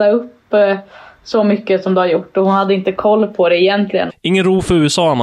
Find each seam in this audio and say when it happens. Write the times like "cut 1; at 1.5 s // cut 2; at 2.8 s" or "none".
cut 1; at 4.1 s